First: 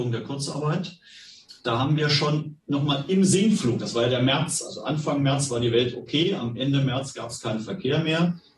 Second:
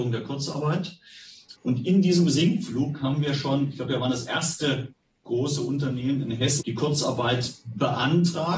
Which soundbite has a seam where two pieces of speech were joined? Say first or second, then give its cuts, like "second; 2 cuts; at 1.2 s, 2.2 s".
second; 2 cuts; at 1.5 s, 6.6 s